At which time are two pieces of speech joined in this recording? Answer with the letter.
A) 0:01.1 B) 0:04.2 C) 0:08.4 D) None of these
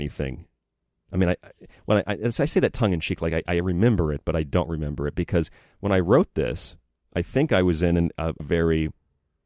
C